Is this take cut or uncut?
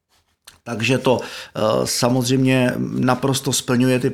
uncut